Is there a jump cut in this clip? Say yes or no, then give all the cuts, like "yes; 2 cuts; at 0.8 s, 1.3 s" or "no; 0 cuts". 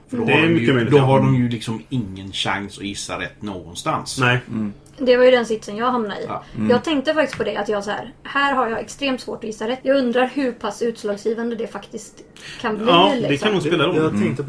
yes; 1 cut; at 9.8 s